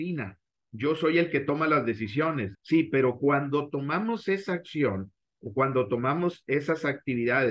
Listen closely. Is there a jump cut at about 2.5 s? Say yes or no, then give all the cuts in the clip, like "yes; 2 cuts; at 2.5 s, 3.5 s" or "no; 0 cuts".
yes; 1 cut; at 2.5 s